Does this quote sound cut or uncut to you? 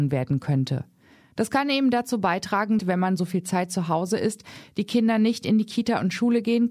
cut